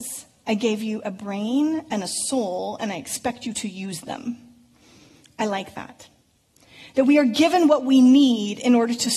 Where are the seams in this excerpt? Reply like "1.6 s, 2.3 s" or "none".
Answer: none